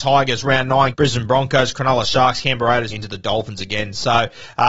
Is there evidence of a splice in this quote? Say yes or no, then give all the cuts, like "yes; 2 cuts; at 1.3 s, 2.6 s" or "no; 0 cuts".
yes; 2 cuts; at 0.9 s, 2.9 s